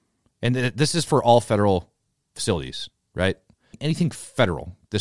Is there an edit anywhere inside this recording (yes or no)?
no